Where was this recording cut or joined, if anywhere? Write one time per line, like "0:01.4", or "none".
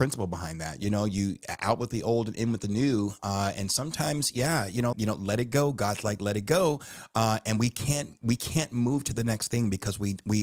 0:04.9